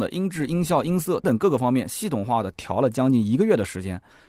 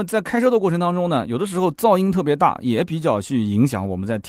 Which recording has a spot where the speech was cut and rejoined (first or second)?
first